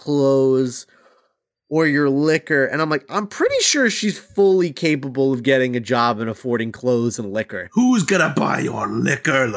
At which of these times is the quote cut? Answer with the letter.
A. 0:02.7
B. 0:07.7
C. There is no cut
C